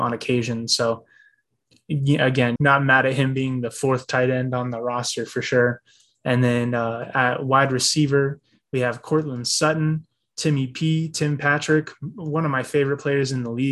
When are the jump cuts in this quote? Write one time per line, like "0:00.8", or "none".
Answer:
0:02.6